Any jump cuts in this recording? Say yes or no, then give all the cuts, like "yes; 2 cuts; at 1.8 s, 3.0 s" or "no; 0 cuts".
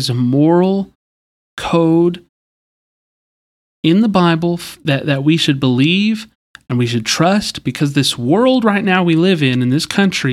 no; 0 cuts